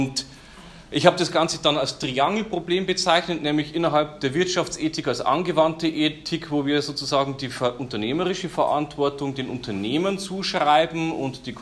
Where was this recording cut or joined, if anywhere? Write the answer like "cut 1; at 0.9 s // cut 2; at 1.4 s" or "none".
none